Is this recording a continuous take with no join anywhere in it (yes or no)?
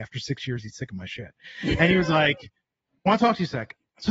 yes